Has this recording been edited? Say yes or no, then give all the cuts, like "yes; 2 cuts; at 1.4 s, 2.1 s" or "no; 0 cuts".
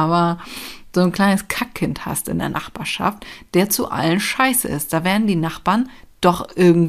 no; 0 cuts